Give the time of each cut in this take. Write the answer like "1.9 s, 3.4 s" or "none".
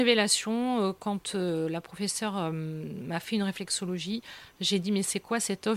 none